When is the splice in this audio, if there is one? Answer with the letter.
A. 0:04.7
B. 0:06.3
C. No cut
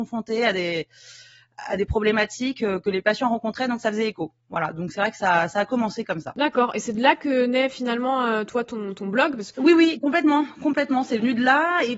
C